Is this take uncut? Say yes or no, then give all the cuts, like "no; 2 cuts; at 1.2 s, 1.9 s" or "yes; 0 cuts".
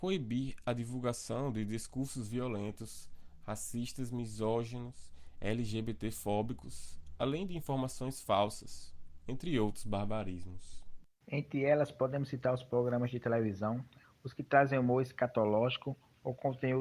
no; 2 cuts; at 11.2 s, 14.0 s